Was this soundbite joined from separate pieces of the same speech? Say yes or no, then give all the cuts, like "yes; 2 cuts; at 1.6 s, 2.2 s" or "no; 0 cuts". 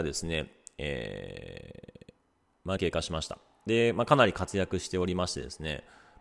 yes; 1 cut; at 2.8 s